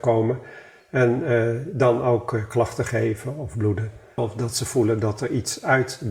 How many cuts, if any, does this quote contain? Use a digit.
1